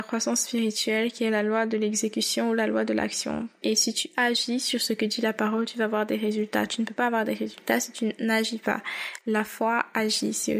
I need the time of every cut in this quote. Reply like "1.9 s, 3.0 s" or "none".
3.6 s